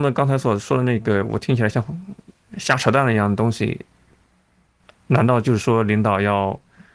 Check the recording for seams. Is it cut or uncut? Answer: uncut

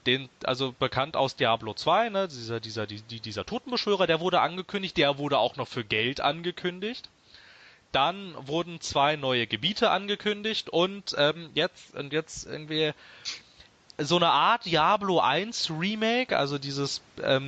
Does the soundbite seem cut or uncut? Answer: uncut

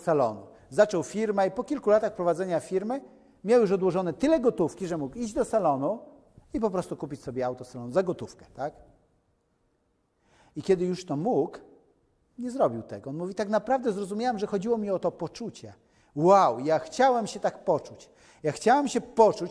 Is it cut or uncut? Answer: uncut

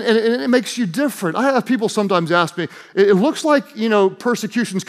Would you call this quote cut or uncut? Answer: uncut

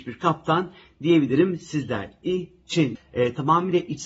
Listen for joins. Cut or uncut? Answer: cut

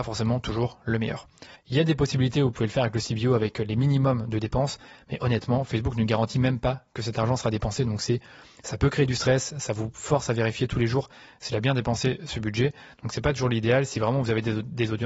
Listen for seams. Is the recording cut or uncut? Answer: cut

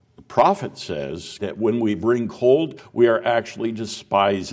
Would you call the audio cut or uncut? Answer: cut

